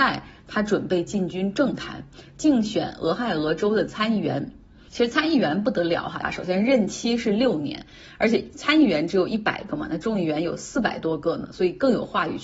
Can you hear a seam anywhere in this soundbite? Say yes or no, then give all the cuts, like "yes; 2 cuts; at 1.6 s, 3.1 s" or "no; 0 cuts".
yes; 1 cut; at 6.2 s